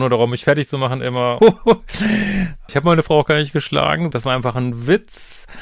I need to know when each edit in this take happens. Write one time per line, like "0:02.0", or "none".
0:01.4
0:02.7
0:04.1